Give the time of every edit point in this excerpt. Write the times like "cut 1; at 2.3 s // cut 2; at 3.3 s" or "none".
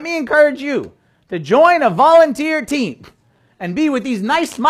none